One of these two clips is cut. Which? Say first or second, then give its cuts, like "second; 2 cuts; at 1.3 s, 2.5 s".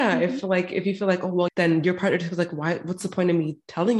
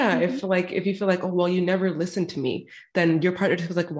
first; 1 cut; at 1.5 s